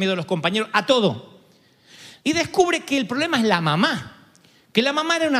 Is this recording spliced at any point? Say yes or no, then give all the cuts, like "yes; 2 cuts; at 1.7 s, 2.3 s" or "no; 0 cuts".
yes; 1 cut; at 2.2 s